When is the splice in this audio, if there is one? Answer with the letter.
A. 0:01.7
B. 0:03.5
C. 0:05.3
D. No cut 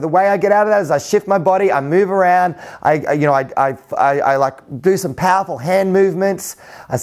D